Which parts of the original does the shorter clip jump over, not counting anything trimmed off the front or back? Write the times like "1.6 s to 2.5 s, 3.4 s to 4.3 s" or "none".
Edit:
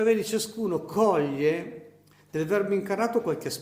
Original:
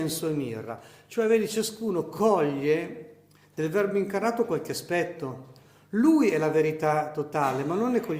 none